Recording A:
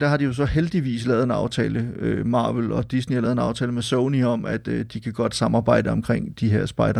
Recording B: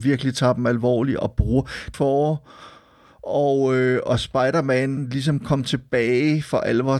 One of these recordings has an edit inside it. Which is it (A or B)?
B